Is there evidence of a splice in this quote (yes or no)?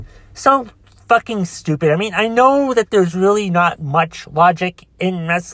no